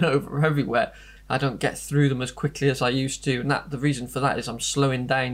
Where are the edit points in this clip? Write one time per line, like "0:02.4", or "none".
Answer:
0:01.2

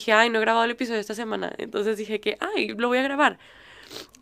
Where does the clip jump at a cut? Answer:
none

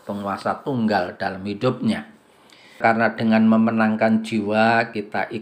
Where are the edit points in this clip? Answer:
0:02.8

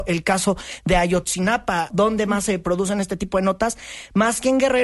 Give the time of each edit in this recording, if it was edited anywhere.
0:01.9

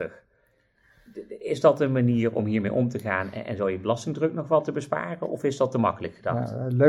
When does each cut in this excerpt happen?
none

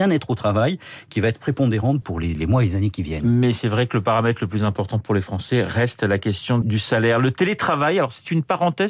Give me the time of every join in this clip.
0:02.0
0:06.6

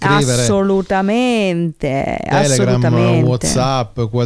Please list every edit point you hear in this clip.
none

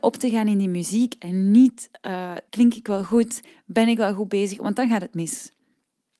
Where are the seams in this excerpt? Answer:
0:02.5

